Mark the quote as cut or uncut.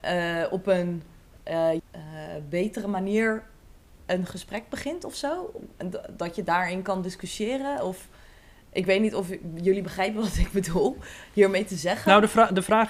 cut